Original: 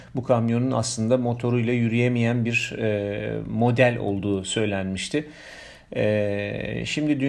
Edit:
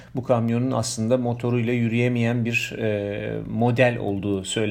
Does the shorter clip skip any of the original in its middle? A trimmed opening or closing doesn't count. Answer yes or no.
no